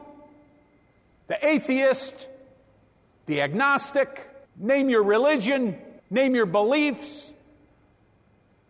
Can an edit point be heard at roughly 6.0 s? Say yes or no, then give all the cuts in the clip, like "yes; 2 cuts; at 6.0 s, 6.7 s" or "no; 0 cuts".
yes; 2 cuts; at 4.4 s, 6.0 s